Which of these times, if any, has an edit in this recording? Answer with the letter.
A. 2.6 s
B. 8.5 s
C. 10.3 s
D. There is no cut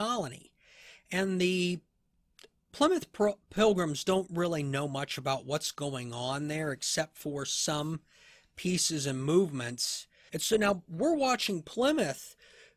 C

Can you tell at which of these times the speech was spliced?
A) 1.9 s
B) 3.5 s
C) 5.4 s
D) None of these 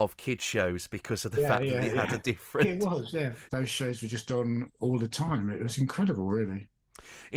B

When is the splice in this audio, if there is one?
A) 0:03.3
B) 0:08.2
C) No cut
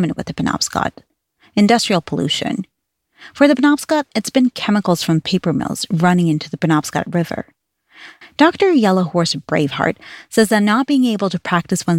B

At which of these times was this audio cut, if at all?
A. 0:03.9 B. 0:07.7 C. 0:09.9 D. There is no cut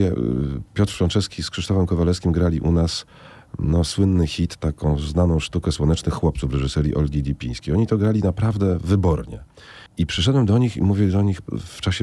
C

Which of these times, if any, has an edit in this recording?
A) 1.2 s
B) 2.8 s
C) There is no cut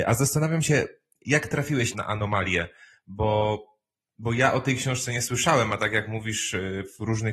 C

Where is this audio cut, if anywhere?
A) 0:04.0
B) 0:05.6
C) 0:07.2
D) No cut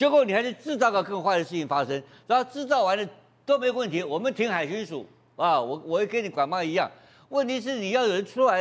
D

